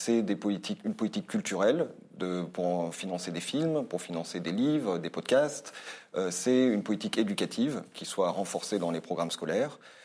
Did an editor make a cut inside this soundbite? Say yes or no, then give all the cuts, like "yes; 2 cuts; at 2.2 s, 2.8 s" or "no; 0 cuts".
no; 0 cuts